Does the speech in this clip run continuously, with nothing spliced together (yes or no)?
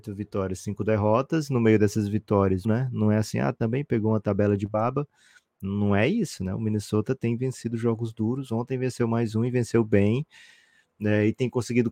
no